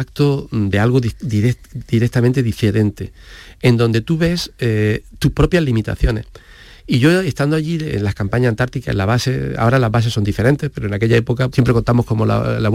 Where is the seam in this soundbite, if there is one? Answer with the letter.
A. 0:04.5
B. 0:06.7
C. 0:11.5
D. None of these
C